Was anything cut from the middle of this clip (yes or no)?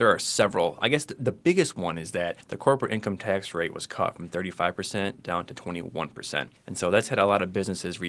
no